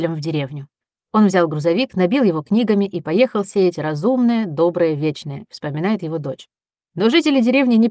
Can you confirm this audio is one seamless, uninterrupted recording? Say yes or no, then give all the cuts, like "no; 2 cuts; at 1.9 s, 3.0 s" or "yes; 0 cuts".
yes; 0 cuts